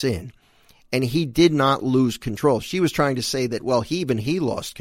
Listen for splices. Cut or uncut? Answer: uncut